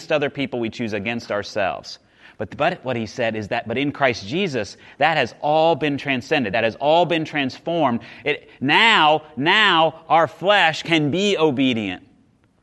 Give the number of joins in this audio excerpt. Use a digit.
0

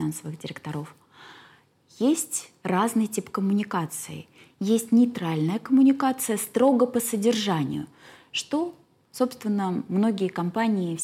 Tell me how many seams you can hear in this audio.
0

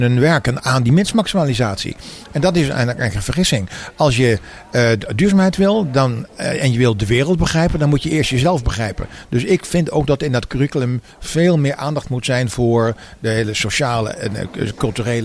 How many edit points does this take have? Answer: 0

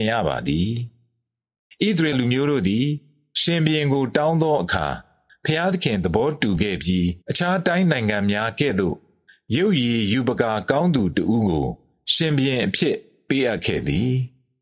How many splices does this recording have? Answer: 2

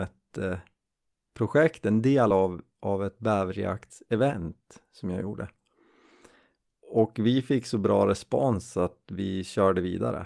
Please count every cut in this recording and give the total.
0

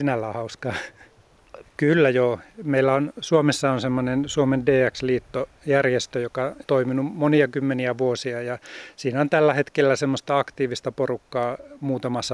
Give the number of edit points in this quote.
2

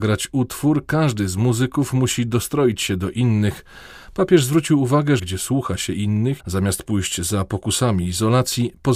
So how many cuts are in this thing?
2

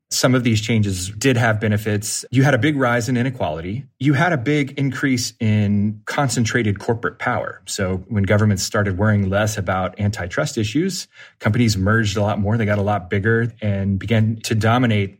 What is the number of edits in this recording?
1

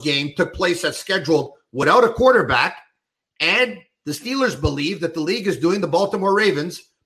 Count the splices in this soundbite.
0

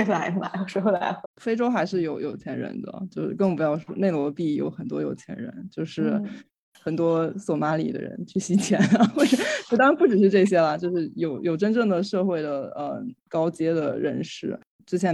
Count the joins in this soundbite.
1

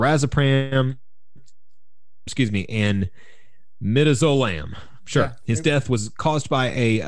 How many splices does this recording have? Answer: 1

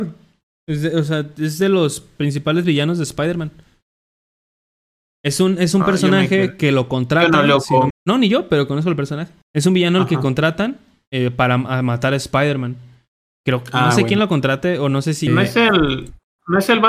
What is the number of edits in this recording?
3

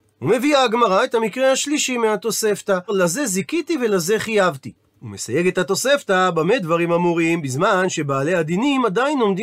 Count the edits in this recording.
1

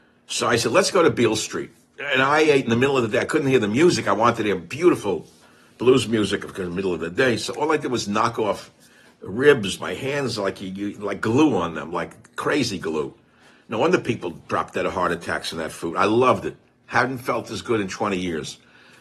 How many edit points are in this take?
0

